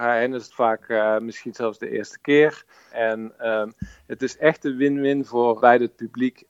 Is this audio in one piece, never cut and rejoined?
no; 2 cuts; at 2.9 s, 5.6 s

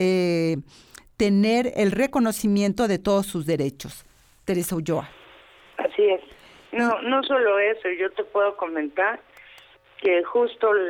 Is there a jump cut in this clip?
no; 0 cuts

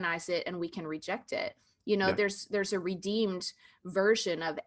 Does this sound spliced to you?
no; 0 cuts

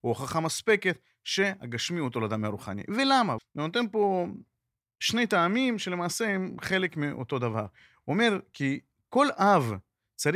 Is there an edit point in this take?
yes; 1 cut; at 3.4 s

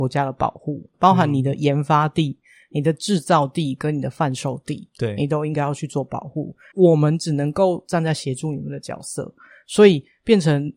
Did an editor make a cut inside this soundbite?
yes; 2 cuts; at 0.9 s, 6.7 s

